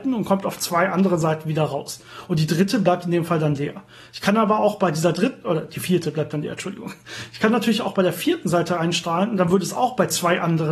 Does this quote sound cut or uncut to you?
uncut